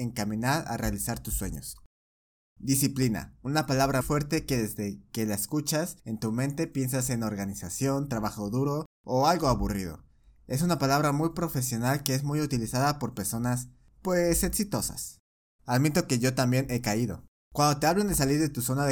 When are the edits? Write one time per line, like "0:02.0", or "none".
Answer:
0:04.0
0:15.6
0:17.3